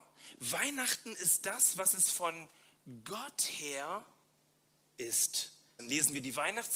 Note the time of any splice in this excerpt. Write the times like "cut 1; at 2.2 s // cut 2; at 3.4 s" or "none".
cut 1; at 5.8 s